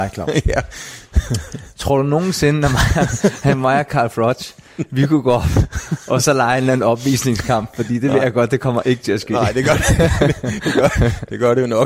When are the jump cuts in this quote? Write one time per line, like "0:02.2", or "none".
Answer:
none